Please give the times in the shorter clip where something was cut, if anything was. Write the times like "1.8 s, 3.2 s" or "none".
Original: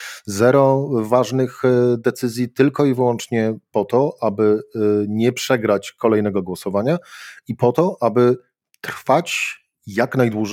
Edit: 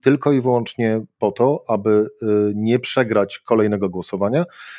none